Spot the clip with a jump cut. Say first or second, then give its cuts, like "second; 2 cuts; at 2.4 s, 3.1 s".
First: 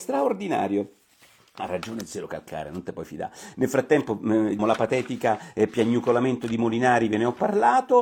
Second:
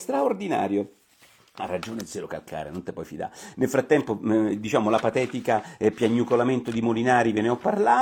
first; 1 cut; at 4.6 s